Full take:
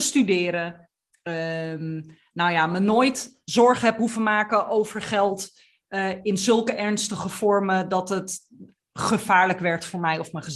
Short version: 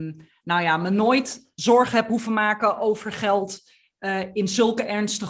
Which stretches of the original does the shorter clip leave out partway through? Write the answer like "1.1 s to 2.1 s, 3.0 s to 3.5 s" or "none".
none